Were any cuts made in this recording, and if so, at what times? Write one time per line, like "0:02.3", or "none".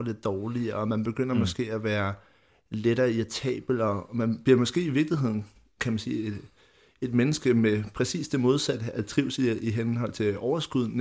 none